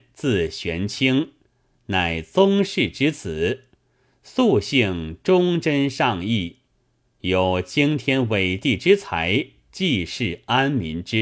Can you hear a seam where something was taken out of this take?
no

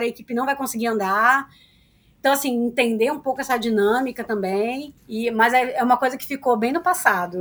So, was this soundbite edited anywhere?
yes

